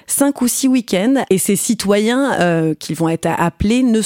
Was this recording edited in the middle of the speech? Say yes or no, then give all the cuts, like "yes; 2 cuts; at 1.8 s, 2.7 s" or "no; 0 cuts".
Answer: yes; 1 cut; at 1.3 s